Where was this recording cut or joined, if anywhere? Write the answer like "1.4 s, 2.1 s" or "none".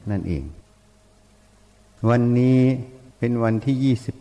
none